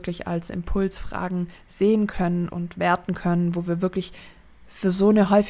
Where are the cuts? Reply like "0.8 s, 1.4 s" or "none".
2.5 s